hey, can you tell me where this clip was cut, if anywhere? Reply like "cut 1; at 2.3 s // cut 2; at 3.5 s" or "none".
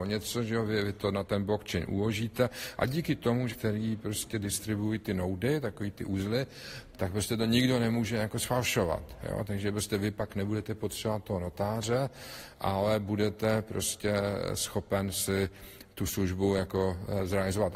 cut 1; at 3.5 s // cut 2; at 6.9 s